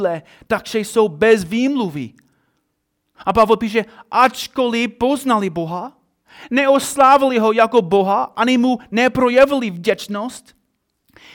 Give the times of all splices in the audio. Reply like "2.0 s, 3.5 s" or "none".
none